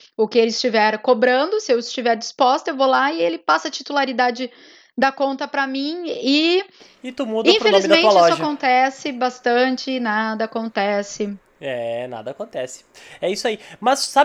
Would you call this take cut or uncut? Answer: uncut